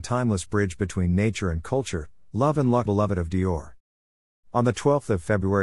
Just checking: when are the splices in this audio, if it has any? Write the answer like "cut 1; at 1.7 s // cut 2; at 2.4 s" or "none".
cut 1; at 2.9 s